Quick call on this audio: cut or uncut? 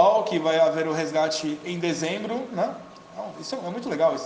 uncut